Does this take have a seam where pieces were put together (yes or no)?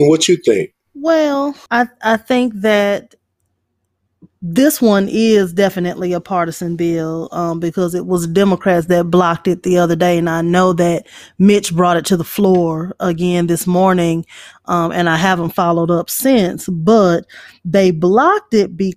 no